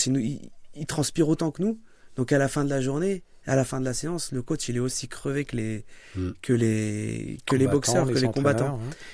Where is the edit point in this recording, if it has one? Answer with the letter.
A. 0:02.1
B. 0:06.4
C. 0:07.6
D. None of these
D